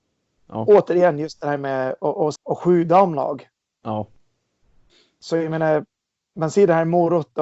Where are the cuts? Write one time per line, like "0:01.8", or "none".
0:02.3